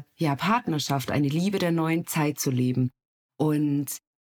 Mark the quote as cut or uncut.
uncut